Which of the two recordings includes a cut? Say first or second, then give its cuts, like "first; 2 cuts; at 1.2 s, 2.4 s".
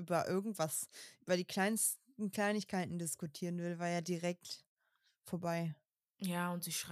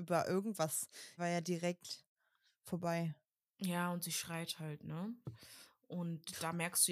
second; 2 cuts; at 1.2 s, 5.2 s